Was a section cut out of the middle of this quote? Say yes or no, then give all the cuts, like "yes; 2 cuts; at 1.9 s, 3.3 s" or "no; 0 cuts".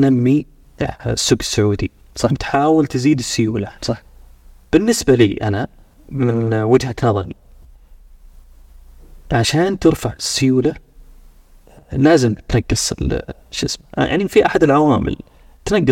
yes; 2 cuts; at 3.8 s, 13.4 s